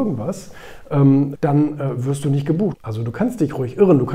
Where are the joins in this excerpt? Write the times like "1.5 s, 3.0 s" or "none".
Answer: 1.4 s, 2.7 s